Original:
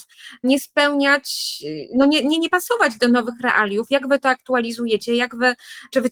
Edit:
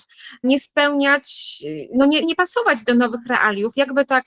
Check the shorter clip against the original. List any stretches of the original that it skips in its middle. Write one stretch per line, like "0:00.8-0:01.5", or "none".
0:02.2-0:02.4